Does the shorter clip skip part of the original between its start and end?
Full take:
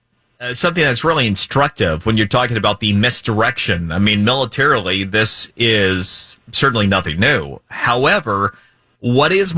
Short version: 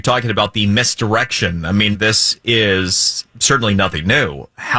yes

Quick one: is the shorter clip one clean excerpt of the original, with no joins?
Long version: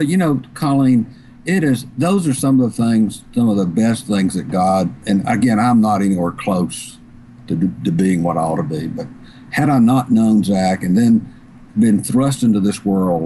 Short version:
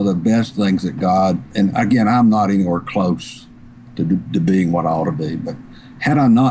yes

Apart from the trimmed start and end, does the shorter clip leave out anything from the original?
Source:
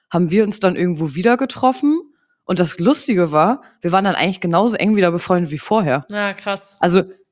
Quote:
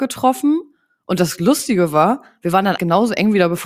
yes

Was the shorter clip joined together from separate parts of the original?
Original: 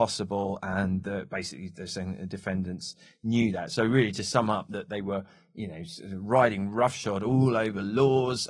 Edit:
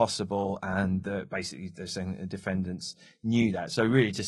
no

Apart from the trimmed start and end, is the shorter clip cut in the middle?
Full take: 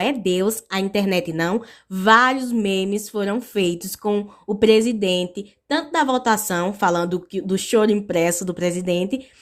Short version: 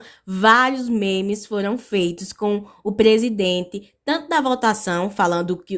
no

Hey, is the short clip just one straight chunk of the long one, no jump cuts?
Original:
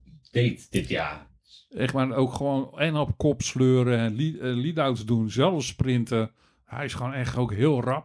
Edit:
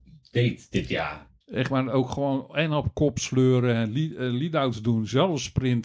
no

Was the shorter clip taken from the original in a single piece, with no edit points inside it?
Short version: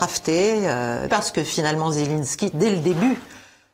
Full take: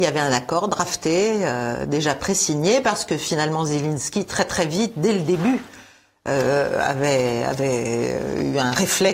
no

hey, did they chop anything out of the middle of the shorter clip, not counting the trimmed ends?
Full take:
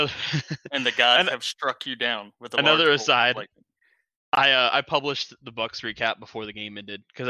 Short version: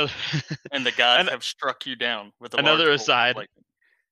no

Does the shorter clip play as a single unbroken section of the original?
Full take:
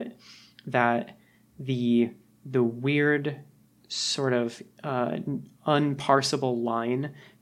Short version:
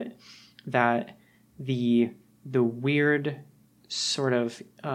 yes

